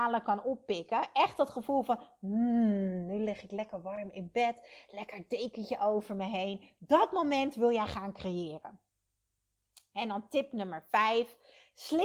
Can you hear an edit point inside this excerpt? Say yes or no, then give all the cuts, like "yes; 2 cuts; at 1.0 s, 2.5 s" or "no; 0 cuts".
no; 0 cuts